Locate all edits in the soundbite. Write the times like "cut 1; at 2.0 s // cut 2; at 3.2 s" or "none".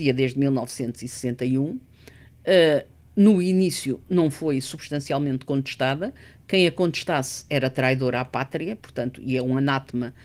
none